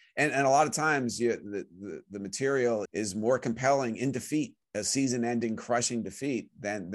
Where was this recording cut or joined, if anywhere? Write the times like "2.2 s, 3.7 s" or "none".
2.9 s, 4.6 s